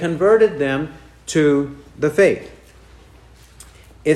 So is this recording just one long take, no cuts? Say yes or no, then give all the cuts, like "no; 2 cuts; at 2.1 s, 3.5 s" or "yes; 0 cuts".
yes; 0 cuts